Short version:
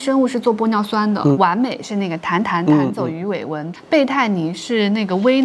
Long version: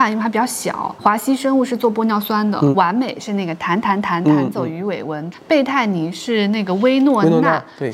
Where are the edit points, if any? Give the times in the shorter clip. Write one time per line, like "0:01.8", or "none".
0:02.4